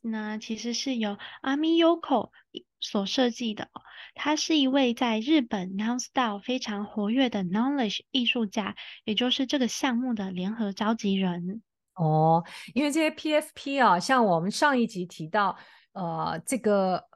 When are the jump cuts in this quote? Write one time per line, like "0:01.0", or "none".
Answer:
none